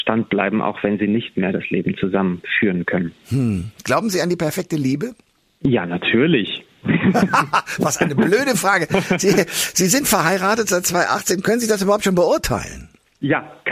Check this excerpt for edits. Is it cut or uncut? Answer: uncut